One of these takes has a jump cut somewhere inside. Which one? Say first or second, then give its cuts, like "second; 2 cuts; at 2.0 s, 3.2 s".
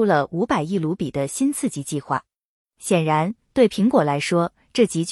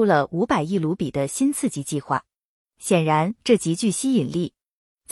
second; 1 cut; at 3.4 s